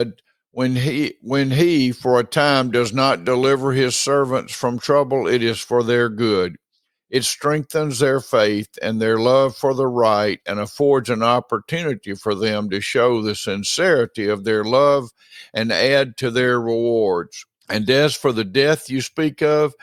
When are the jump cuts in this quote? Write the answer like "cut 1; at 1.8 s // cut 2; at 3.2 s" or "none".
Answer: cut 1; at 17.6 s